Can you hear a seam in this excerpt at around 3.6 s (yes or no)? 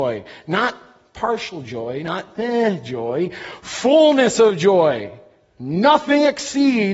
no